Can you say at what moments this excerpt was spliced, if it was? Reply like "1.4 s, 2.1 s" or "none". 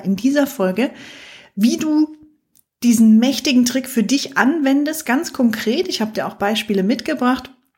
none